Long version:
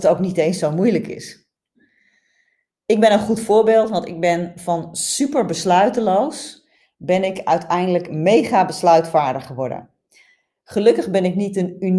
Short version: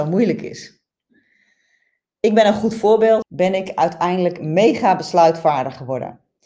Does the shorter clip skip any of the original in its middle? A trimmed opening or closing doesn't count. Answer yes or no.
yes